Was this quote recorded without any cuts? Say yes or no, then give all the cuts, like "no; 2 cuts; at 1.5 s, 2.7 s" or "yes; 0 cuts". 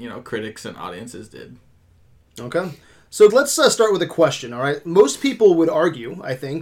no; 1 cut; at 3.3 s